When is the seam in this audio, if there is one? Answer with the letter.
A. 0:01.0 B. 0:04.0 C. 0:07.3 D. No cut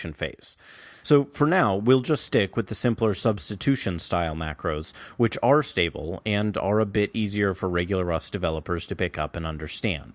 A